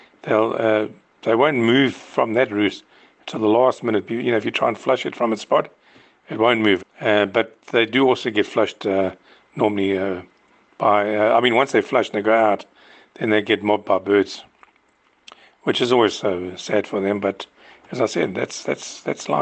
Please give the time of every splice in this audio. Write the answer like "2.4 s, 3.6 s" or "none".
6.8 s